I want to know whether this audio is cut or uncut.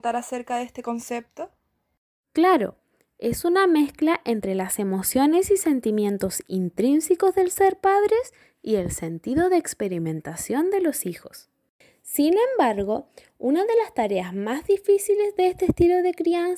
uncut